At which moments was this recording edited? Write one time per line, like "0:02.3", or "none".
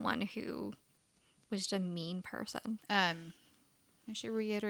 0:01.7
0:02.8